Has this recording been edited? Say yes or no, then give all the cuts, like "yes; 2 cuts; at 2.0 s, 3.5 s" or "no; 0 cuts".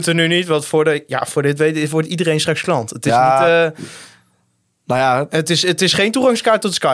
no; 0 cuts